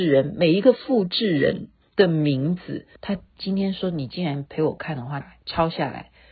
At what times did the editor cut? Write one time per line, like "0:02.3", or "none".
0:03.0
0:05.2